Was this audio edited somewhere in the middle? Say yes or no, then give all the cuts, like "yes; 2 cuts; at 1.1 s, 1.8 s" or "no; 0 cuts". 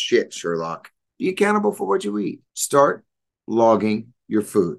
yes; 2 cuts; at 1.1 s, 2.5 s